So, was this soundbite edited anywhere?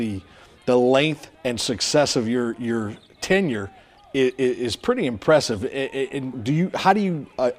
yes; 2 cuts; at 1.3 s, 6.3 s

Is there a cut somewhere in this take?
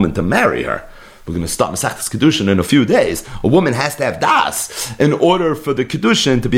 no; 0 cuts

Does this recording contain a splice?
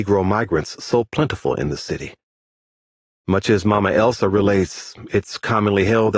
no; 0 cuts

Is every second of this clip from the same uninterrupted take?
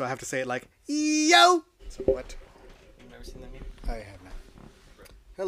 no; 1 cut; at 1.8 s

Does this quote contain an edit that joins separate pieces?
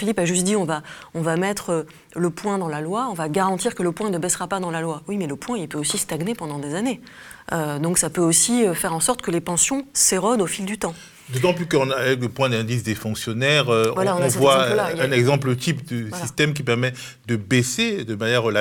no; 0 cuts

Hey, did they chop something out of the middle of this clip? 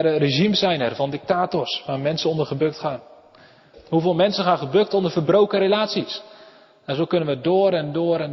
yes; 1 cut; at 3.7 s

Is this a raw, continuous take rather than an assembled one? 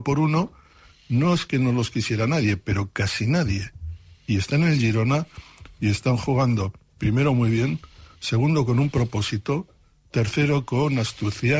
yes; 0 cuts

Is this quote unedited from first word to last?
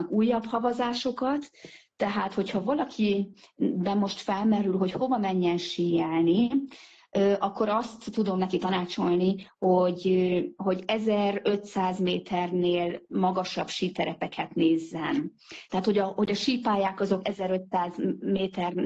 yes; 0 cuts

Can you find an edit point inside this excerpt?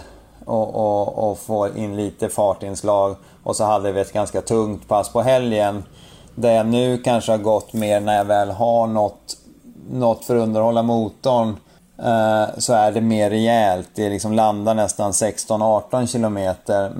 no; 0 cuts

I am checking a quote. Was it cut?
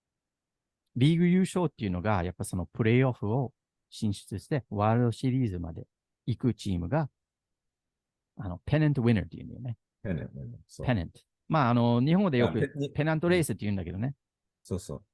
no; 0 cuts

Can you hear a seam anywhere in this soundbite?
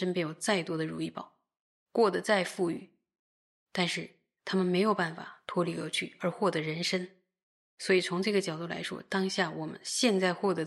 no; 0 cuts

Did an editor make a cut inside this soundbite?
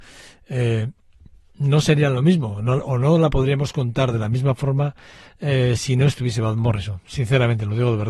no; 0 cuts

